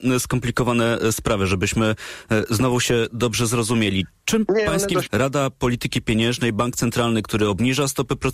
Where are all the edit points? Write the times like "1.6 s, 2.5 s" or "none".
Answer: 5.0 s